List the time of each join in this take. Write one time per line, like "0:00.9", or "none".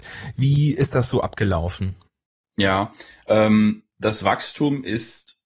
none